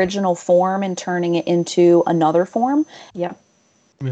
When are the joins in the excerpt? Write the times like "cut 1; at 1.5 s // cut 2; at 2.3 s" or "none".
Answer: cut 1; at 3.1 s